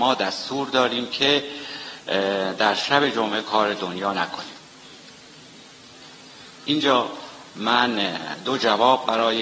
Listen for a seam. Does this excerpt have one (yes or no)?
yes